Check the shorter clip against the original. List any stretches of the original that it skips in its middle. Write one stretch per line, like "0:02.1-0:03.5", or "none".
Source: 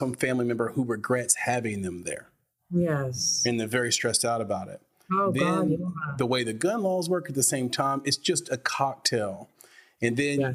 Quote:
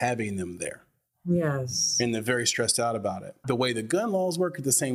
0:04.9-0:06.1